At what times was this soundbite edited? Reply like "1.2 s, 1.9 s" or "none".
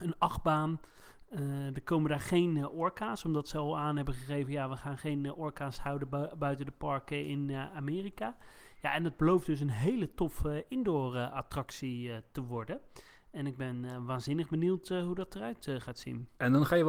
none